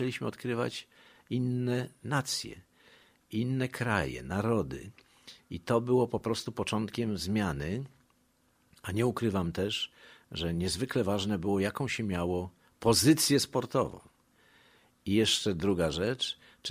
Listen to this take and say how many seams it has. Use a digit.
0